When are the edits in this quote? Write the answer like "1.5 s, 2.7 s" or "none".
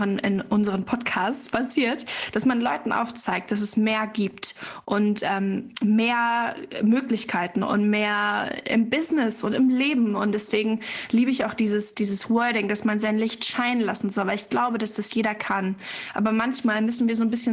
11.9 s